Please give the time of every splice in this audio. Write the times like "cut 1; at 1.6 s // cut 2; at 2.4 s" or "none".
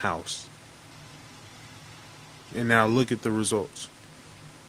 none